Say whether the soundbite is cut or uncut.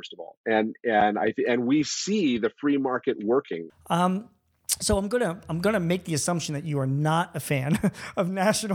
cut